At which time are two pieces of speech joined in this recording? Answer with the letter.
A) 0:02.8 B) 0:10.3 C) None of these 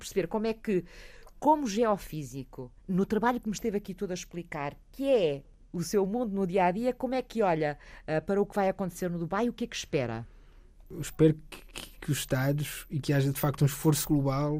A